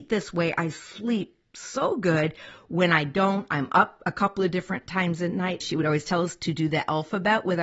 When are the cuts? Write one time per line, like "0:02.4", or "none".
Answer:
0:05.6